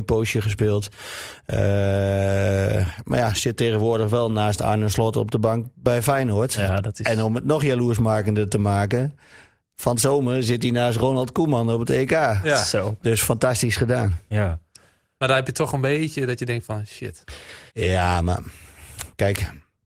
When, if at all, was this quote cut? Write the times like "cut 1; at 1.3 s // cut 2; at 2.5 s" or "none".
cut 1; at 17.7 s